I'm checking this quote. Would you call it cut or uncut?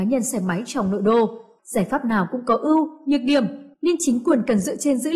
cut